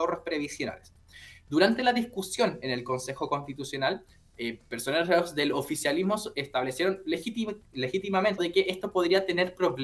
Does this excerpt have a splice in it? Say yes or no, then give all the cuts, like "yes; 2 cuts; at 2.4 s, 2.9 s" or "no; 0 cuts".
yes; 1 cut; at 8.4 s